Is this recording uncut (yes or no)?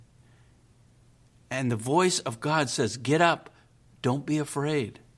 yes